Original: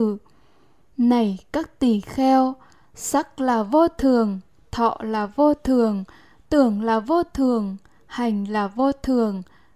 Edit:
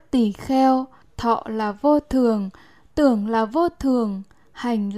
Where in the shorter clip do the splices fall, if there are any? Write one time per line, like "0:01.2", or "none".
0:01.0